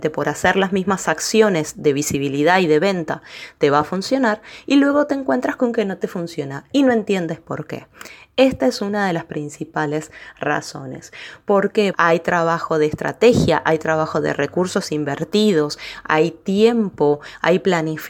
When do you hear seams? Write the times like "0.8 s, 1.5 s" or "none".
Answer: 11.9 s